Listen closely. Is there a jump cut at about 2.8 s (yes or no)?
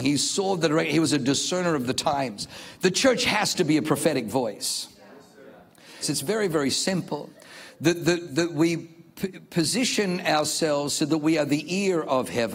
no